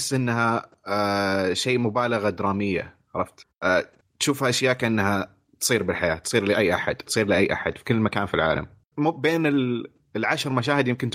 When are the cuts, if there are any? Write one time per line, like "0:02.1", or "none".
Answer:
0:07.1
0:08.9